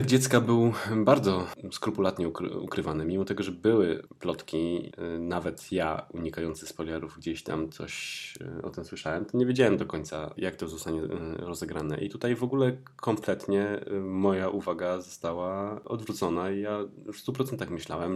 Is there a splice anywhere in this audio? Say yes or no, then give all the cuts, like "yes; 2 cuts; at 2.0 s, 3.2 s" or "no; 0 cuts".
no; 0 cuts